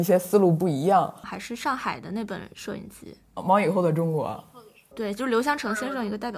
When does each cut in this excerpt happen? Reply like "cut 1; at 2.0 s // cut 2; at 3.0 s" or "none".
cut 1; at 1.2 s